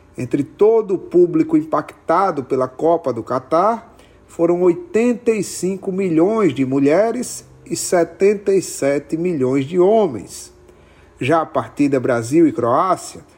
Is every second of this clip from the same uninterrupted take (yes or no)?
no